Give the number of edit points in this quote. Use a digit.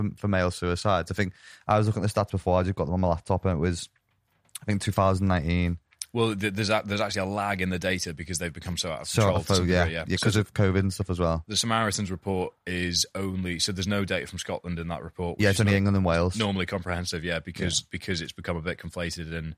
0